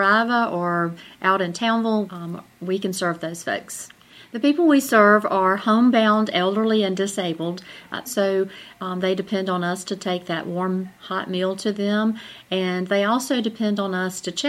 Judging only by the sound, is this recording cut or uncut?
cut